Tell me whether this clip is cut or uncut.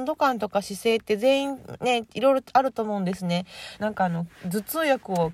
cut